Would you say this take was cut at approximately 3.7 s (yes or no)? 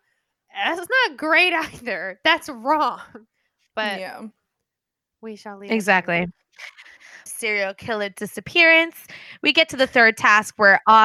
no